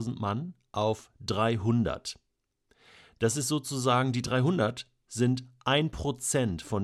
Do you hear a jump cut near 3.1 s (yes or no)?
no